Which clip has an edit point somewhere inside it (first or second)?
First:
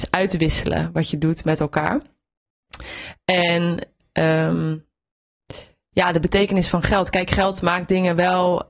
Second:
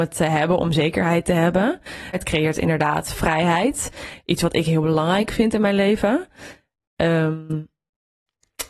second